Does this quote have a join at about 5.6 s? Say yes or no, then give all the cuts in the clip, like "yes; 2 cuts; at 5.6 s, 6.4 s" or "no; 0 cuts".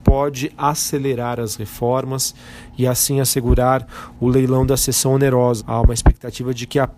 yes; 1 cut; at 5.6 s